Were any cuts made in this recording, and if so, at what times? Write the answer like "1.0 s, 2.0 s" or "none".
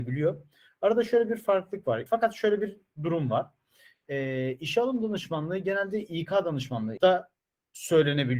2.1 s, 7.0 s

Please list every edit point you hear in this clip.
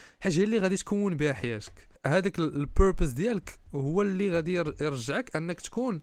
2.0 s

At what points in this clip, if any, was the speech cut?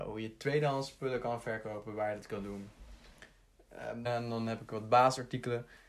4.1 s

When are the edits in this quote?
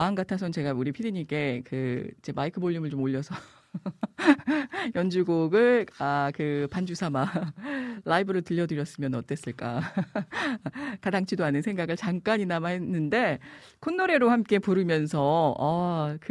none

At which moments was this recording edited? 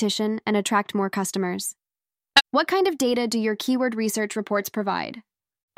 none

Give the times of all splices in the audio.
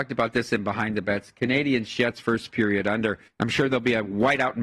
3.3 s

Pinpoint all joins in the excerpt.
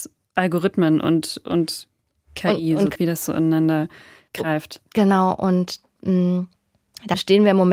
3.0 s

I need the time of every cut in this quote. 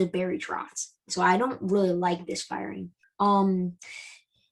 1.0 s, 3.0 s

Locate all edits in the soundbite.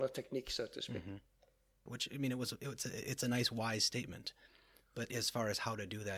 1.9 s

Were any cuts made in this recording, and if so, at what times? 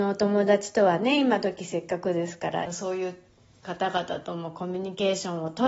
2.7 s

